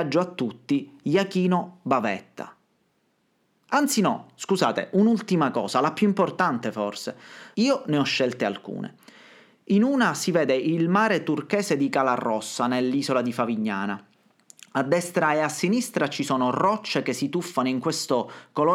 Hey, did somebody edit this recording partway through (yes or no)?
yes